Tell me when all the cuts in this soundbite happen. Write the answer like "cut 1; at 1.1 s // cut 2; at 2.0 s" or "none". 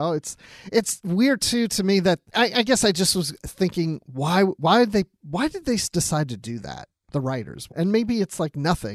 cut 1; at 2.3 s // cut 2; at 7.7 s